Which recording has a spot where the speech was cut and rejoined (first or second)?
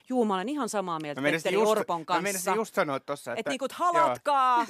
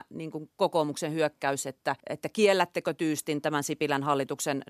second